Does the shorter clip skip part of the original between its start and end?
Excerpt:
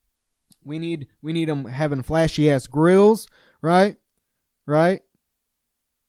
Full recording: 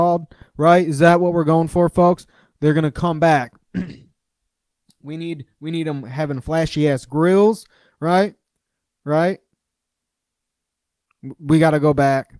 no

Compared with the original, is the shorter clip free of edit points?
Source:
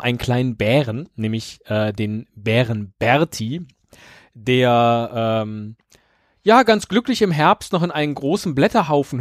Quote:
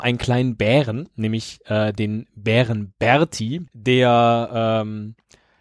no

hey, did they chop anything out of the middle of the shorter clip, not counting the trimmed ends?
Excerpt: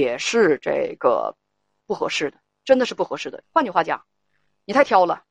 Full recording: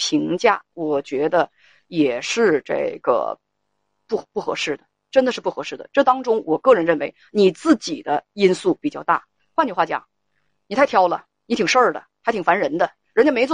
yes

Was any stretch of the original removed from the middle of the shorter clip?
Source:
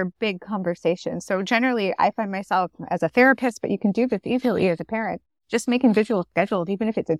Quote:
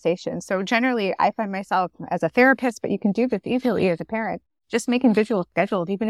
no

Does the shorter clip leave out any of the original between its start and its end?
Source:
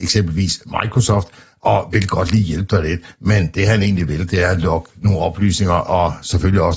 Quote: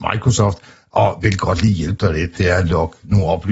yes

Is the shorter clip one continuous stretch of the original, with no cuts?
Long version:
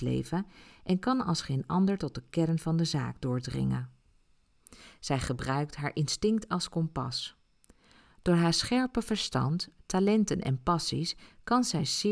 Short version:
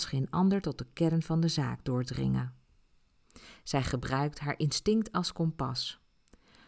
yes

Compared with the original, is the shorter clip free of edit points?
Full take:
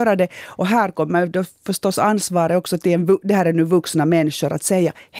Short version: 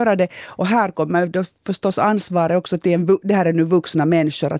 yes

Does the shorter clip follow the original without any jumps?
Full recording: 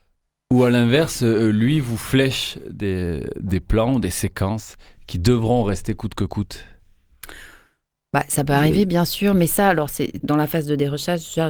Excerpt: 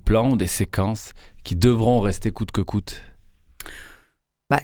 yes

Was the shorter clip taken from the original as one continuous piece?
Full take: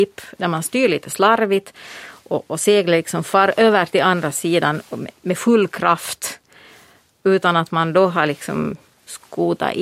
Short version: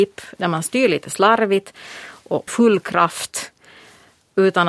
no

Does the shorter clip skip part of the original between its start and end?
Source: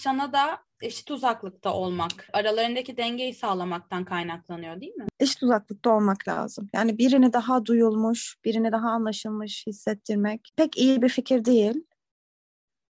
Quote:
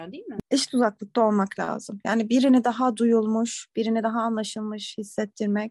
no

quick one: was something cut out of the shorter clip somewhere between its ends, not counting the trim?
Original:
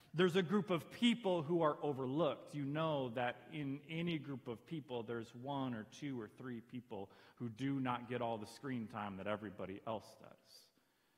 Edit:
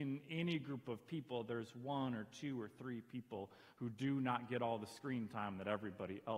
no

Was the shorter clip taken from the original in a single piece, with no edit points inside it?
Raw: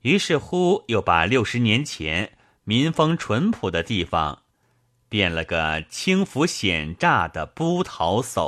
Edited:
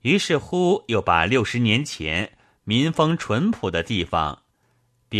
yes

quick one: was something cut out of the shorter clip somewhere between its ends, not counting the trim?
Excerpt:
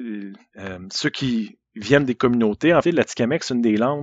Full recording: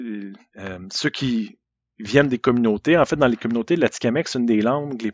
yes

